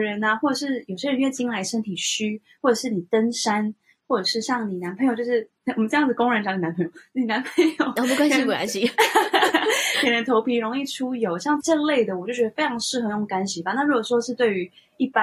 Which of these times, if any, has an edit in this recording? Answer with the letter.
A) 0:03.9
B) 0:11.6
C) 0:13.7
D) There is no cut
B